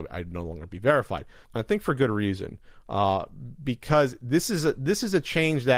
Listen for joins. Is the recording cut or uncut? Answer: cut